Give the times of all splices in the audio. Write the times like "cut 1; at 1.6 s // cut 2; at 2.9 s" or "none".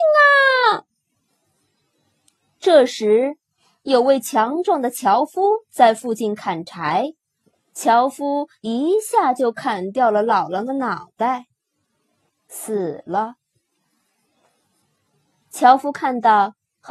cut 1; at 7.5 s // cut 2; at 12.3 s